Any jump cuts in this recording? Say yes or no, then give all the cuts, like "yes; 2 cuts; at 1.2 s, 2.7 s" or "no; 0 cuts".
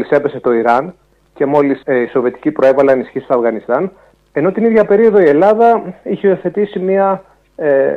yes; 1 cut; at 1.8 s